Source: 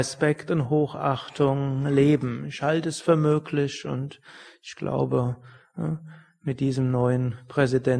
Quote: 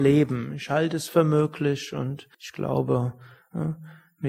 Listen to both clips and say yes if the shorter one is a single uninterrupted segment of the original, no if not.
no